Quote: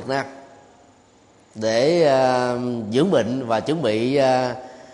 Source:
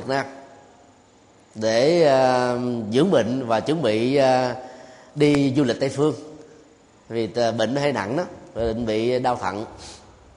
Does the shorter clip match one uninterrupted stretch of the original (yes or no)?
yes